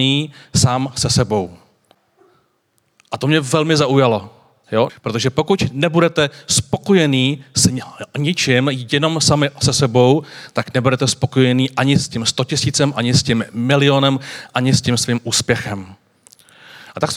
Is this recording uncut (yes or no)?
no